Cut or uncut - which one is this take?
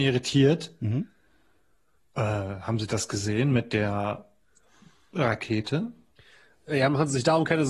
uncut